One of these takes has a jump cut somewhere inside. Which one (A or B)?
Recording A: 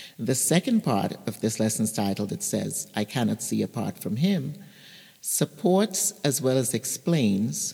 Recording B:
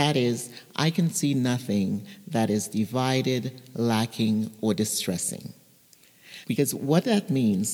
B